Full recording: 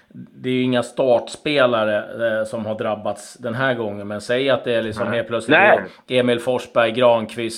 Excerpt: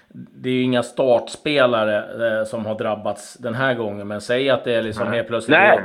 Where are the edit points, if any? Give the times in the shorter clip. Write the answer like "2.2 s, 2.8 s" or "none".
none